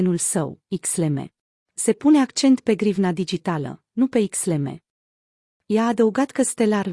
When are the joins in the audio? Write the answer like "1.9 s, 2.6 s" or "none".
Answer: 1.6 s, 5.5 s